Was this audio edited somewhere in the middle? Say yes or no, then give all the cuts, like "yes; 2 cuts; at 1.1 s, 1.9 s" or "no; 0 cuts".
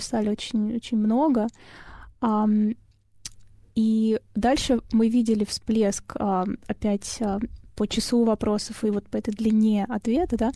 no; 0 cuts